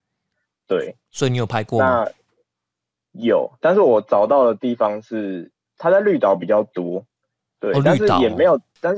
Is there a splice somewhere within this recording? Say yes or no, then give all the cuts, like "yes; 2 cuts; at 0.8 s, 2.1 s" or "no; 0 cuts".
no; 0 cuts